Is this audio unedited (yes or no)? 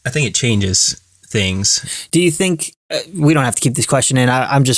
yes